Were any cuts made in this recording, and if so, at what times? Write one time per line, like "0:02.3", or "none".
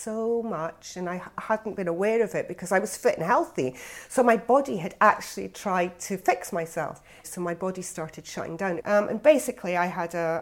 0:07.2
0:08.8